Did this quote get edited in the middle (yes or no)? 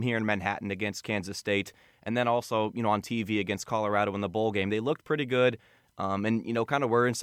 yes